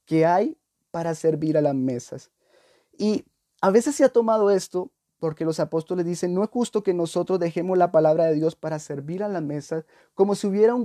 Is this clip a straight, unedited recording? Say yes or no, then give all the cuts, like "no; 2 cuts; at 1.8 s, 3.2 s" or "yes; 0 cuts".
yes; 0 cuts